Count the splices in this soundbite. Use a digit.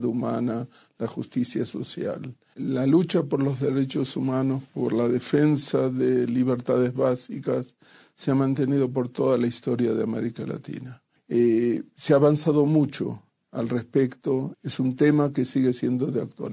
3